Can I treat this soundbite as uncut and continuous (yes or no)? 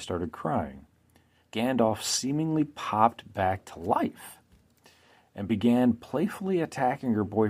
no